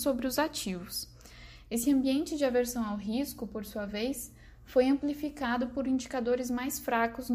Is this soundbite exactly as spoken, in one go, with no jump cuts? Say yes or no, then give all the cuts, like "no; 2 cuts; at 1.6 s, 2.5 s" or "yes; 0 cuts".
yes; 0 cuts